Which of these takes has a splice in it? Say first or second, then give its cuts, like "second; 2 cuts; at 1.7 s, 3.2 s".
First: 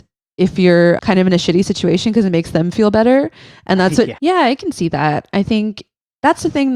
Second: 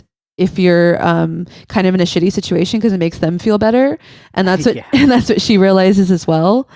first; 2 cuts; at 1.0 s, 4.2 s